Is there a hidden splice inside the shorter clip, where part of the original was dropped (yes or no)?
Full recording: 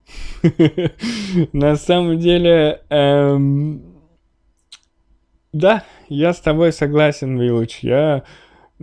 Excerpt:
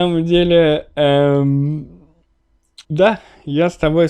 yes